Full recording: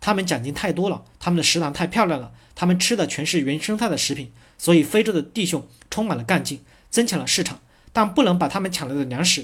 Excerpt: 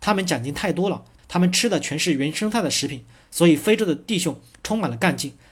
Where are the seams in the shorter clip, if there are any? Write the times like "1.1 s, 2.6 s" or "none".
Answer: 1.2 s